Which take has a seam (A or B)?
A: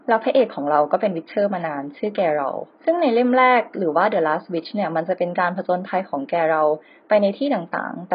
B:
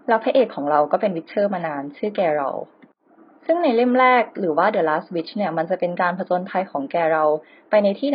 A